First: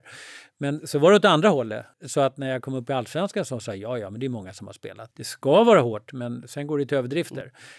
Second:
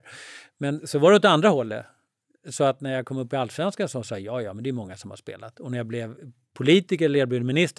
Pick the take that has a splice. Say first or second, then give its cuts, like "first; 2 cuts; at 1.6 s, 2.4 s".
first; 2 cuts; at 1.9 s, 5.1 s